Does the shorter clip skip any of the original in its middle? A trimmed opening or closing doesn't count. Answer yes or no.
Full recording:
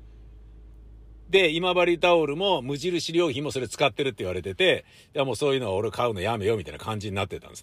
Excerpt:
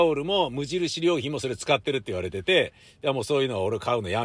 no